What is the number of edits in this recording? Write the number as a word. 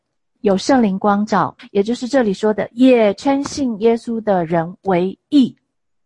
one